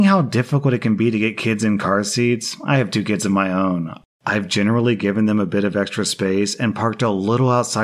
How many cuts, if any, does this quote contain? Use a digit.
0